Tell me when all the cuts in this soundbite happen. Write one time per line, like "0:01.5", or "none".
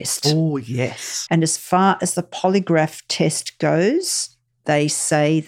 0:01.3